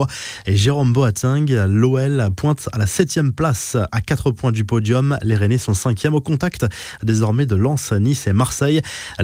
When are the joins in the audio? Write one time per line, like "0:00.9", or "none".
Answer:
none